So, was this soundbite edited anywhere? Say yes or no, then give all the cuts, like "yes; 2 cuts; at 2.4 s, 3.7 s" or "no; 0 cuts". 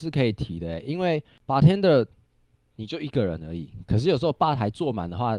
no; 0 cuts